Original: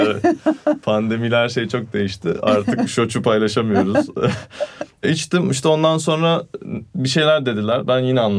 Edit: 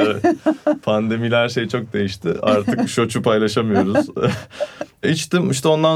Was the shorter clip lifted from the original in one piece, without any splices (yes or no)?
yes